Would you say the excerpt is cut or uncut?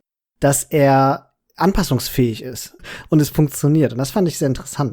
cut